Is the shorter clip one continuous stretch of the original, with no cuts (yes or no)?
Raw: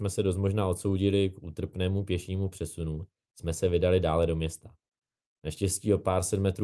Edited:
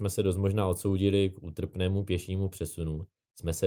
yes